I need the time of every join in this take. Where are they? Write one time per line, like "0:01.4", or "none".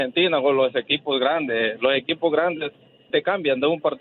0:03.1